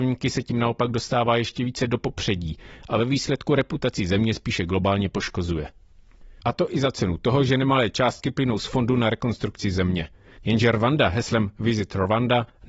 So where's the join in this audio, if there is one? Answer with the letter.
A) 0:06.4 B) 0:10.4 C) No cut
A